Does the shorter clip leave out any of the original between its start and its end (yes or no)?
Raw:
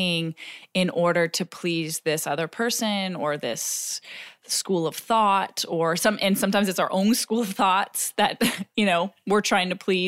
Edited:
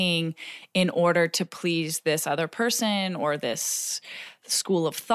no